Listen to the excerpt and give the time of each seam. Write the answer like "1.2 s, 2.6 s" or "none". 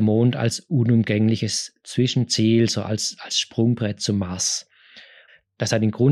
none